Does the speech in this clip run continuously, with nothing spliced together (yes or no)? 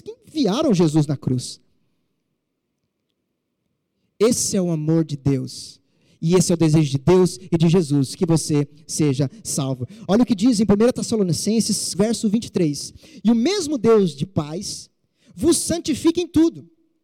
no